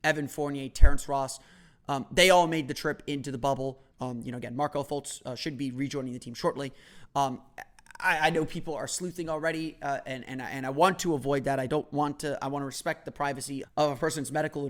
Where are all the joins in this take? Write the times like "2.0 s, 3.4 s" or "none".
3.9 s, 7.1 s, 13.6 s